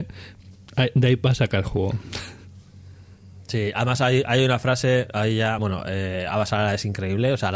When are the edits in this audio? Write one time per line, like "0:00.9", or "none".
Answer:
none